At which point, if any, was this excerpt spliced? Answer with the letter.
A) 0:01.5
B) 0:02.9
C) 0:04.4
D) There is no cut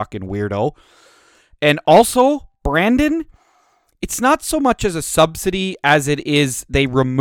D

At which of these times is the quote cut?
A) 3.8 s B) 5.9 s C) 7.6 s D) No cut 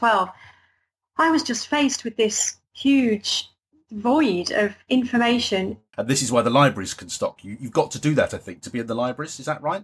B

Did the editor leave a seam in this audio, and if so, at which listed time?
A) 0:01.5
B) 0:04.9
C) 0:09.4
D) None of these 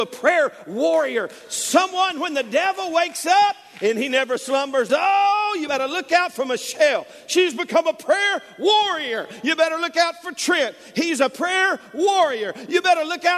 B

